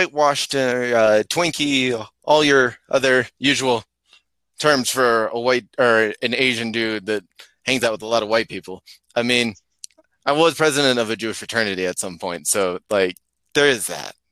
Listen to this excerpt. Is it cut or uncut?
uncut